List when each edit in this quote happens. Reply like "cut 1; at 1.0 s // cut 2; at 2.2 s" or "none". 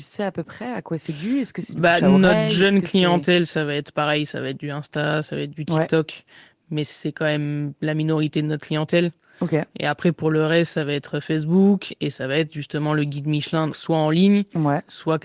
cut 1; at 13.7 s